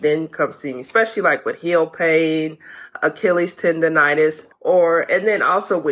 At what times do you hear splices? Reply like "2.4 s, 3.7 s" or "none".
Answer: 4.5 s